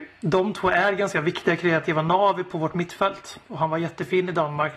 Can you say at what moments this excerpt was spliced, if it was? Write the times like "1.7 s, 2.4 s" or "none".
3.4 s

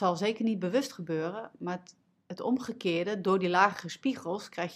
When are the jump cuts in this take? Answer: none

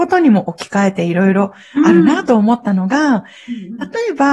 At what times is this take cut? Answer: none

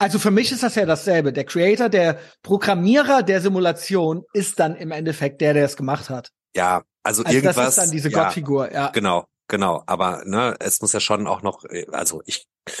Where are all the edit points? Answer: none

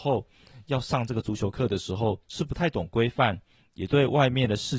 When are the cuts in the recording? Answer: 2.2 s

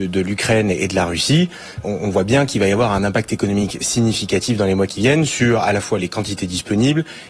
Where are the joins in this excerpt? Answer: 1.8 s

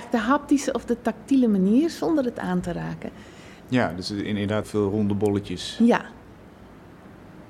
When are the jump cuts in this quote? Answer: 3.6 s, 4.6 s

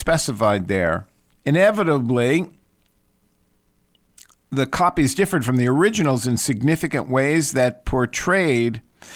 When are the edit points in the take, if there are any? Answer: 1.4 s

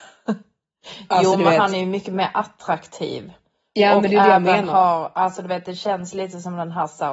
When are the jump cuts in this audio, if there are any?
none

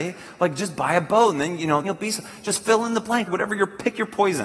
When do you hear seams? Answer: 1.8 s, 3.3 s

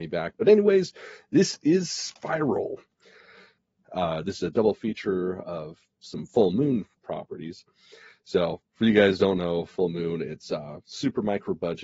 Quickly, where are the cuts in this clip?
3.8 s, 7.0 s, 8.7 s

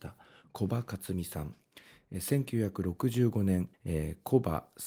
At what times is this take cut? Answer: 3.7 s

